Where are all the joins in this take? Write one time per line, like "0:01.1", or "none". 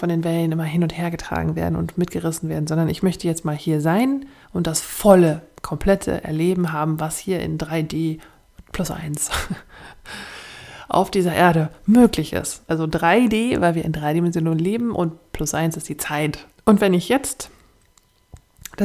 0:12.7
0:16.6

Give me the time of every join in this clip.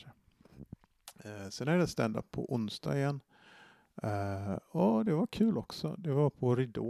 none

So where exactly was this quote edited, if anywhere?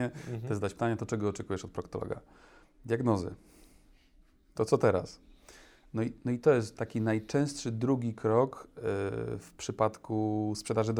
none

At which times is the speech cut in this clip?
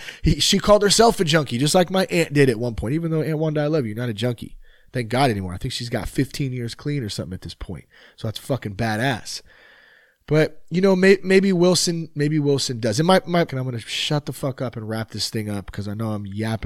0:13.5

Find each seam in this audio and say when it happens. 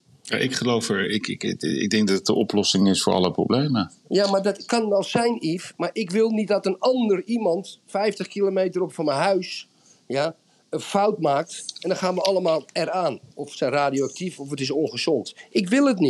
none

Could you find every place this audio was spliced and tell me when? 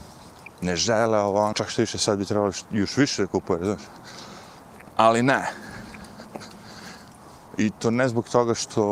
0:01.5
0:07.5

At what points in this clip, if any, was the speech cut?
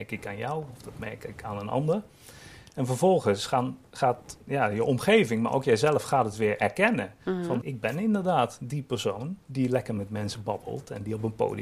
0:07.6
0:09.4

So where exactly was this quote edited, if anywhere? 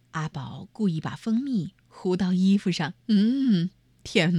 0:03.0

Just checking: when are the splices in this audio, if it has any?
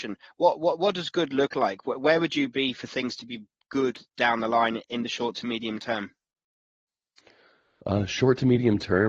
none

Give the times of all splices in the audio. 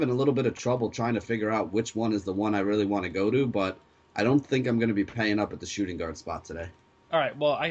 none

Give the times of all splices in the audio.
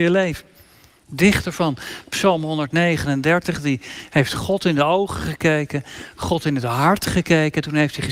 none

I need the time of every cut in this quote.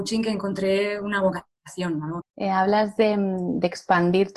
0:02.2

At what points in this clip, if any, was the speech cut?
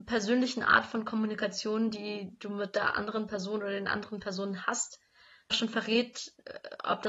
0:05.5

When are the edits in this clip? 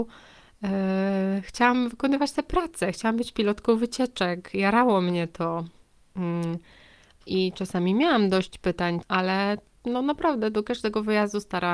0:07.2
0:09.0

